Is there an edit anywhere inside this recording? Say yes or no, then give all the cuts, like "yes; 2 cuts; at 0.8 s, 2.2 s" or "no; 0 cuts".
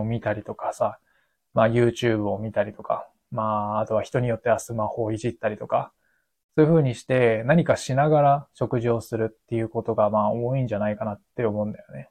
no; 0 cuts